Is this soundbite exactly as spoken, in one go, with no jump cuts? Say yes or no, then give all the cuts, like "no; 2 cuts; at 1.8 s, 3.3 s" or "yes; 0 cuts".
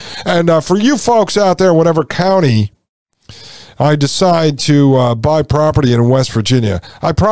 yes; 0 cuts